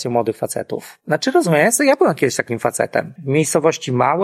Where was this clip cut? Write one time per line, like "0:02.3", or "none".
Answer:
0:03.2

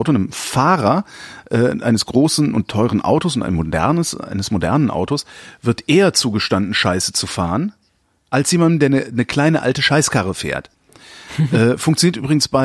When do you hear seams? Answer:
none

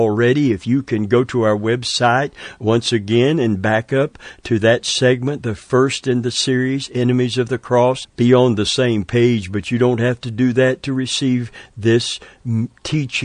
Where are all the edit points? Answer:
0:08.0

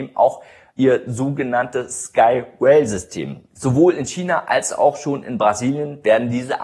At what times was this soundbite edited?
none

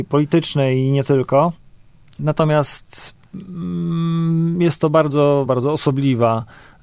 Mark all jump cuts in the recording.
0:02.2
0:05.5

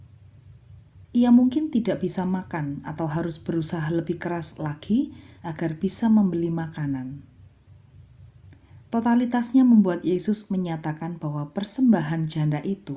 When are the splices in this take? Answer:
0:08.9

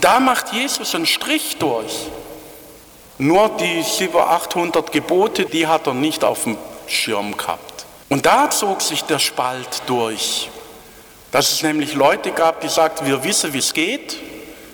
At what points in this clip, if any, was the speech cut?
0:03.0
0:05.5
0:08.0

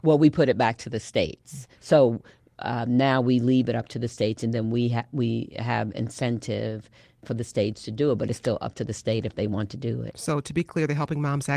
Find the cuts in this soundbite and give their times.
0:01.8

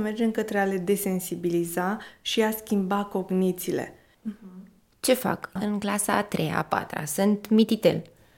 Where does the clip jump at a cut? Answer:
0:04.1
0:05.6

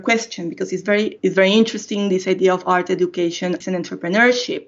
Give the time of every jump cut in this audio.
0:01.2
0:03.6

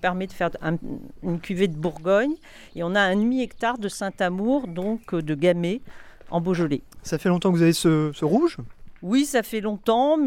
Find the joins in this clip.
none

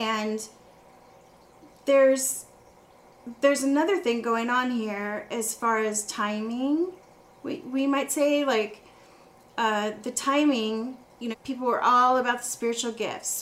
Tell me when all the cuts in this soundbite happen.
0:11.3

